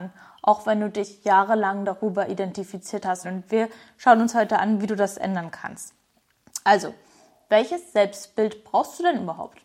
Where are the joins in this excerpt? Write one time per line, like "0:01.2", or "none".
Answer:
0:03.2